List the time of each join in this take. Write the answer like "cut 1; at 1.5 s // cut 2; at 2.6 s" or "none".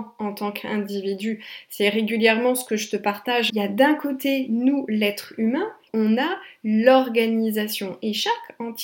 cut 1; at 3.5 s // cut 2; at 5.9 s